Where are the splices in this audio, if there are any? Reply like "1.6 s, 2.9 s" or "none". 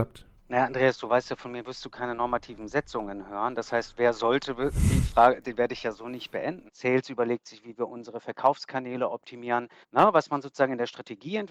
5.4 s, 6.7 s, 9.8 s